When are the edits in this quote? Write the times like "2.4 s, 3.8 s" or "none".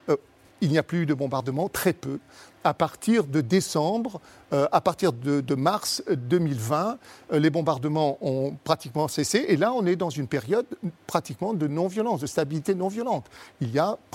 none